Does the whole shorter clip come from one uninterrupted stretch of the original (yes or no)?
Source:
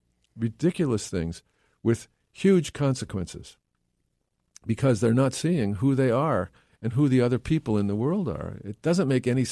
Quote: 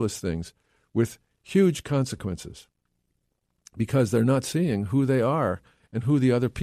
yes